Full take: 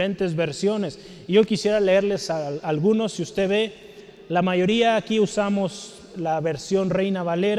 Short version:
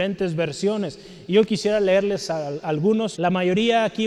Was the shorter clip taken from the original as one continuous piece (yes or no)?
no